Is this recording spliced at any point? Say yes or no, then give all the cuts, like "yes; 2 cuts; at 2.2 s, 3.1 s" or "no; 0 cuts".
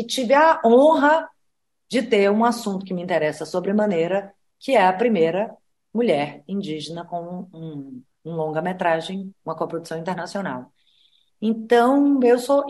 yes; 2 cuts; at 8.1 s, 9.3 s